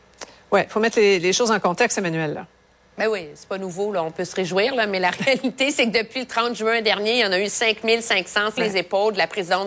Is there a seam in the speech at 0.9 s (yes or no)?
no